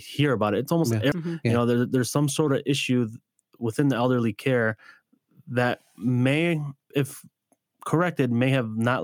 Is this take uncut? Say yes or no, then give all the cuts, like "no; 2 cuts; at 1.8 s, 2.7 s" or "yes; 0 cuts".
no; 2 cuts; at 1.1 s, 6.9 s